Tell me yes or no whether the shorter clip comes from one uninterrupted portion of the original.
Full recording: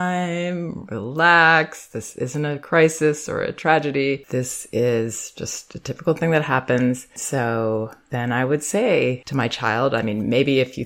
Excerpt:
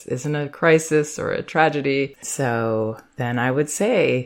no